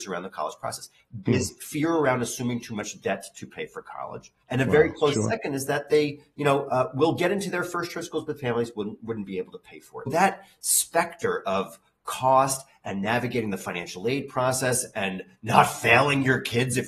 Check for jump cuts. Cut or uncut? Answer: cut